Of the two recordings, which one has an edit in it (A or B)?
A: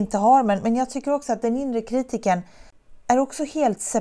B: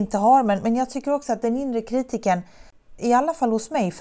B